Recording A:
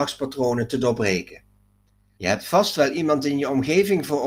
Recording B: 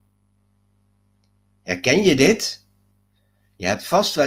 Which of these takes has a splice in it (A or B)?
A